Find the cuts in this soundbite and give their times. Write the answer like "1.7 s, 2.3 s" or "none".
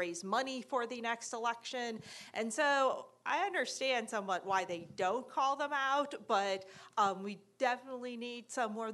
none